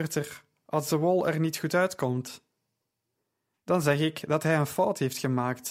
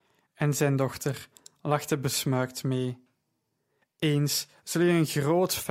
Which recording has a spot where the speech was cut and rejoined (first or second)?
second